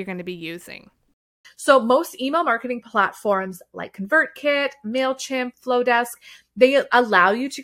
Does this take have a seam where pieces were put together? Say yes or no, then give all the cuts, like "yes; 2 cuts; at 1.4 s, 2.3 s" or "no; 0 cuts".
yes; 1 cut; at 1.4 s